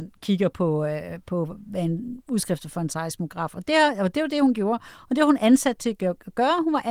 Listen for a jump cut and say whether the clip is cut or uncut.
uncut